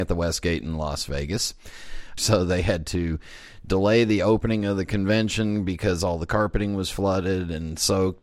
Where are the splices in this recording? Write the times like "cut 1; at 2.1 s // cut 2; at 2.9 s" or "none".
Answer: cut 1; at 2.2 s

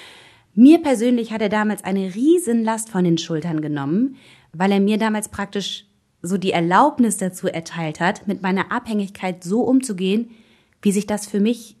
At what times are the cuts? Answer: none

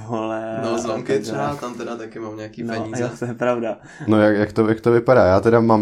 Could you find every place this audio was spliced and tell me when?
none

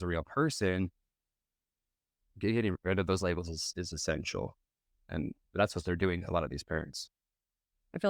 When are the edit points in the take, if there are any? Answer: none

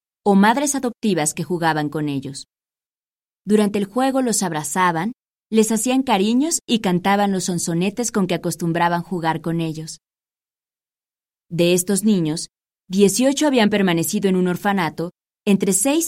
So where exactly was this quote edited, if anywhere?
none

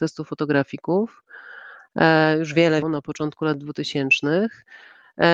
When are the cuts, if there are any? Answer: cut 1; at 2.8 s

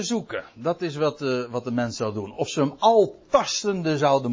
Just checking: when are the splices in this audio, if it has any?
none

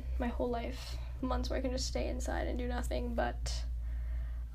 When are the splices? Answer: cut 1; at 1.2 s

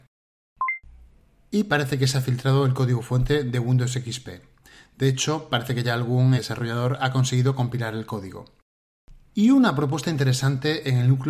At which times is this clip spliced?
cut 1; at 6.4 s // cut 2; at 9.3 s

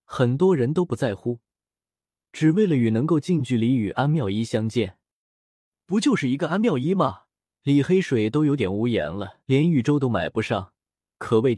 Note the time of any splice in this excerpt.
cut 1; at 7.5 s // cut 2; at 9.4 s

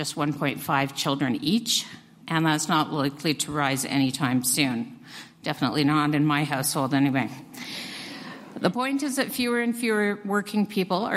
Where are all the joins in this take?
cut 1; at 2.2 s

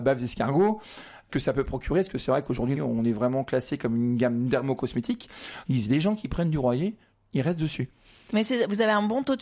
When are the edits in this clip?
cut 1; at 1.3 s // cut 2; at 2.8 s

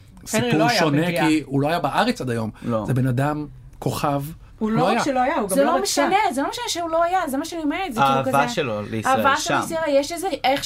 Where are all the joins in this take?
none

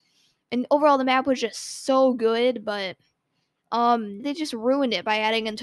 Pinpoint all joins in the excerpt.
cut 1; at 4.2 s

